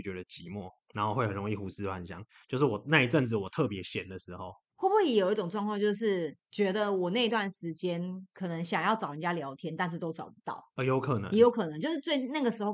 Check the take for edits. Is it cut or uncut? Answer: uncut